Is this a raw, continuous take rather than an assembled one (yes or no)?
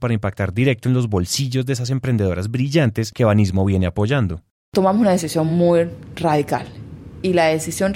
yes